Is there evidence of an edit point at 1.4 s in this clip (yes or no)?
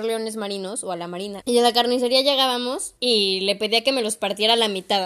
yes